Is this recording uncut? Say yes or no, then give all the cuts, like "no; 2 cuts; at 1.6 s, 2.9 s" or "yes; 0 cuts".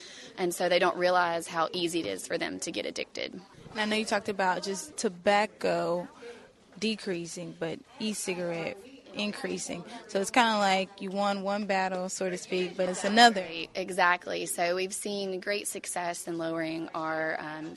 no; 1 cut; at 12.9 s